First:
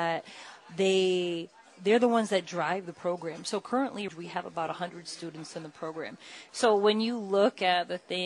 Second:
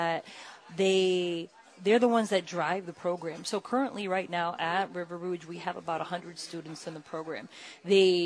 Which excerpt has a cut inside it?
first; 2 cuts; at 4.1 s, 6.5 s

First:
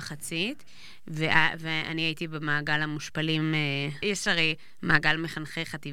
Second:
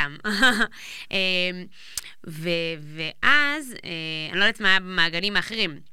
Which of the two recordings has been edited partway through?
first; 1 cut; at 4.0 s

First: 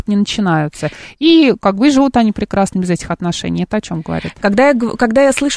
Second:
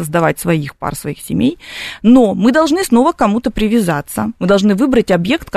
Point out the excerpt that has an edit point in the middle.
second; 1 cut; at 4.4 s

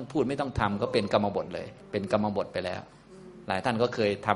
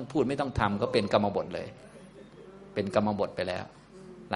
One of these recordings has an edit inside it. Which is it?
first; 1 cut; at 1.8 s

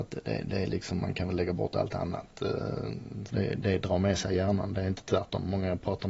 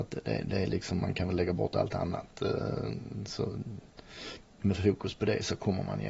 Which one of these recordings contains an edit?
first; 1 cut; at 3.3 s

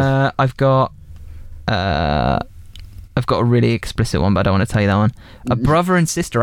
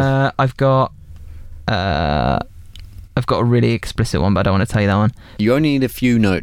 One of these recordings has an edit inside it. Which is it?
second; 1 cut; at 5.4 s

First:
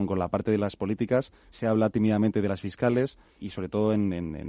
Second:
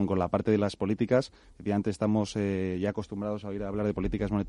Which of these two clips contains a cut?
first; 2 cuts; at 1.5 s, 3.4 s

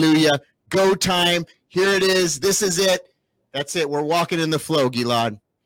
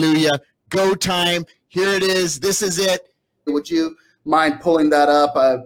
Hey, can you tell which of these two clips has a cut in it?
second; 1 cut; at 3.5 s

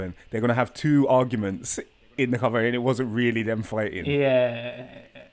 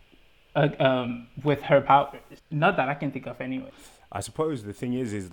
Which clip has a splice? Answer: second; 1 cut; at 2.4 s

